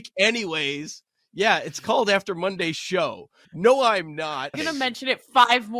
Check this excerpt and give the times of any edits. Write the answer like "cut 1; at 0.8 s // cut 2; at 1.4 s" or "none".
cut 1; at 3.4 s // cut 2; at 4.5 s

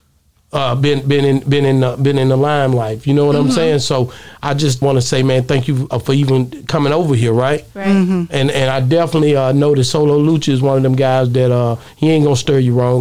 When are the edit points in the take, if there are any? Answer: cut 1; at 4.8 s // cut 2; at 5.9 s

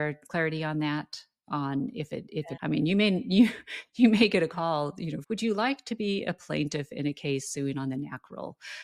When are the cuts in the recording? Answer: cut 1; at 2.6 s // cut 2; at 5.2 s

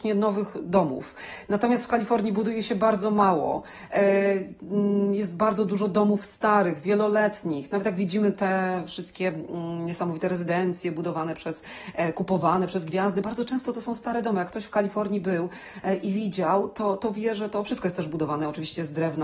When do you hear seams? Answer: none

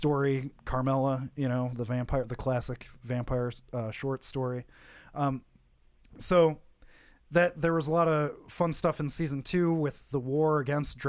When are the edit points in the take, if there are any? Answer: none

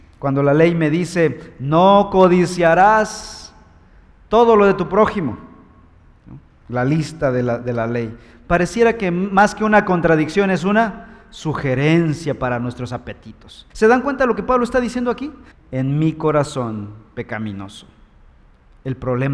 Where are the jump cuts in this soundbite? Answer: cut 1; at 13.7 s // cut 2; at 15.5 s

